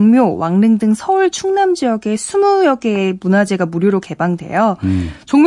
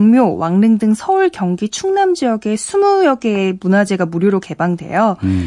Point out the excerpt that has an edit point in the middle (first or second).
first